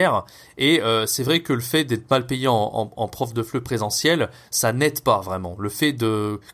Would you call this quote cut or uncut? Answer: uncut